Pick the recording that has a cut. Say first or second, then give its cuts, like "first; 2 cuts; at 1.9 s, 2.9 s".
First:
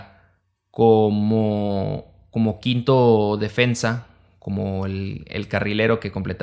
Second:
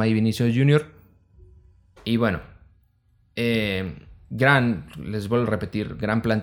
second; 1 cut; at 2.0 s